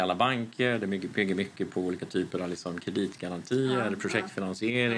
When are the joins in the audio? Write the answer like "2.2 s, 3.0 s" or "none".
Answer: none